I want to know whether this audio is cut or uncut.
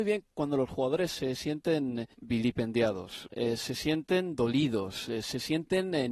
cut